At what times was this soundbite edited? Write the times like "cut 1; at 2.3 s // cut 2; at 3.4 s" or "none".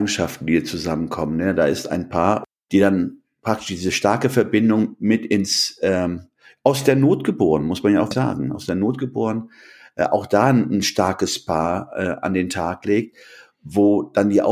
cut 1; at 8.1 s